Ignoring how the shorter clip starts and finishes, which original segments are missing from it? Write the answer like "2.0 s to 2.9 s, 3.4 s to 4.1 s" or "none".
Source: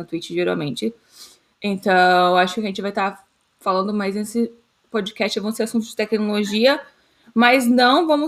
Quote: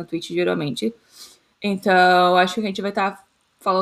none